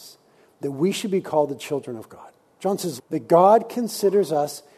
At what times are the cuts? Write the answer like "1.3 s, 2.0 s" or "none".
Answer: 3.0 s